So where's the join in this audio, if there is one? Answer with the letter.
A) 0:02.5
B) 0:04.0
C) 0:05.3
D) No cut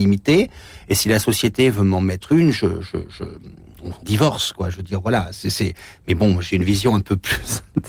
B